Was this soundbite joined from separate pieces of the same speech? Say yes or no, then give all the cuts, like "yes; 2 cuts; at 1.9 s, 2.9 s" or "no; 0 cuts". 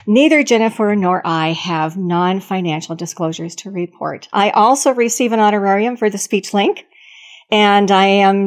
yes; 1 cut; at 4.3 s